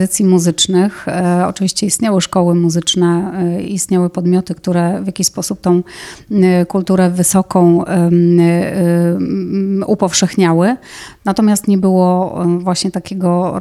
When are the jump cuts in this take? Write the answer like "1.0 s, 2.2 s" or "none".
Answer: none